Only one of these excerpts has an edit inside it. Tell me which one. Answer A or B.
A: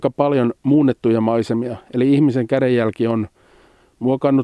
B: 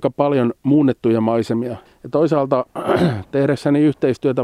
B